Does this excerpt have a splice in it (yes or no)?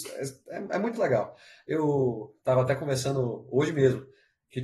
yes